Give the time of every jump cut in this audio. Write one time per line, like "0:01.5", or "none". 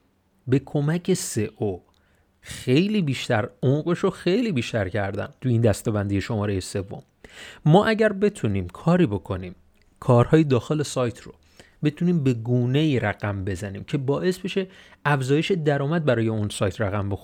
0:05.4

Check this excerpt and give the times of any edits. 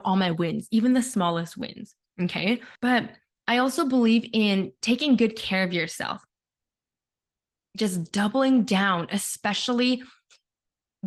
0:02.8

